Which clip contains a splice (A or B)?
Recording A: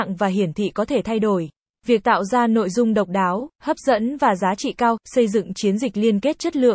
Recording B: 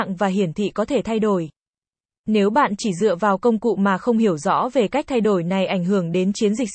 A